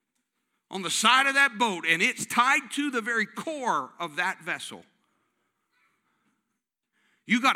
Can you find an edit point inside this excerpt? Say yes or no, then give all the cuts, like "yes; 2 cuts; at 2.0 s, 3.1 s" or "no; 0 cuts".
no; 0 cuts